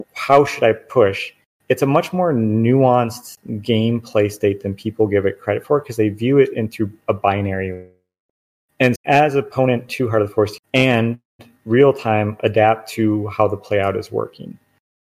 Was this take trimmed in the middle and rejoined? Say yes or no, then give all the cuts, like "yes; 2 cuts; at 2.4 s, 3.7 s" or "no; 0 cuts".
yes; 2 cuts; at 9.0 s, 10.6 s